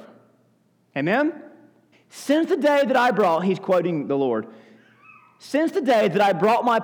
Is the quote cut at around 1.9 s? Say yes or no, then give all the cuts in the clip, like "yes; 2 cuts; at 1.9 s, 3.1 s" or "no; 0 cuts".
yes; 1 cut; at 1.9 s